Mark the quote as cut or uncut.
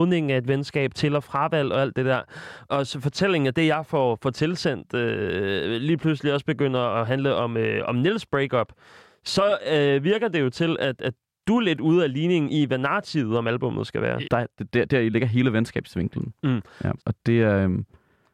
cut